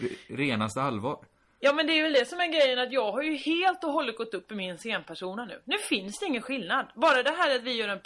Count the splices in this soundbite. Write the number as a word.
zero